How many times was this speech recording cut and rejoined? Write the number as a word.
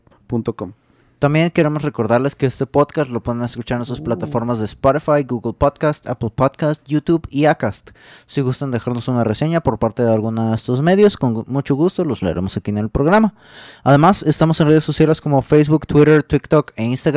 zero